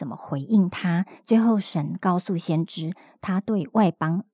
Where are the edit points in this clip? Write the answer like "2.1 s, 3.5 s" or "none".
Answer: none